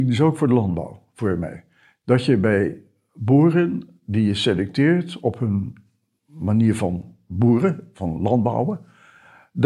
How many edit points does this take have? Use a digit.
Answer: 0